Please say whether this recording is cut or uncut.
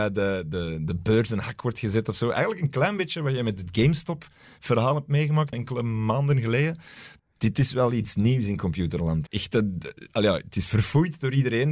cut